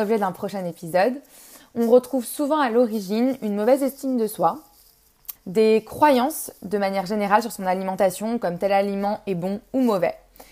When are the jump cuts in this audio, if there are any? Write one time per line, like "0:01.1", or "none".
0:05.3